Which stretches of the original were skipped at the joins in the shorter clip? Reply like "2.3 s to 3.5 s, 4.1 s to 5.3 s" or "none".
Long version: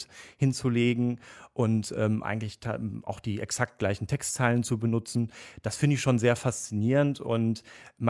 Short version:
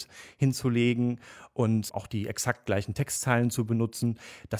1.9 s to 3.0 s